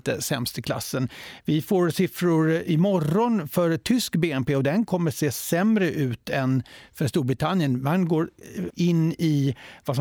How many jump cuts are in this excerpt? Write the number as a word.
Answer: one